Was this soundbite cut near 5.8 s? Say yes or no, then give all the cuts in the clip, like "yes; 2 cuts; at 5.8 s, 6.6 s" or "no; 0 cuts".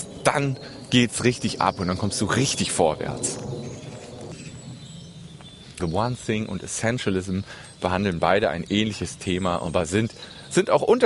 yes; 1 cut; at 5.8 s